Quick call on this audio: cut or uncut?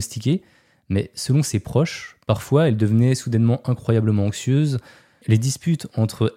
cut